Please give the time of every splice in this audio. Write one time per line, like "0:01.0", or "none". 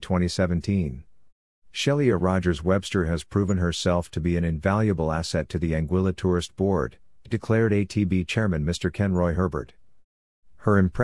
none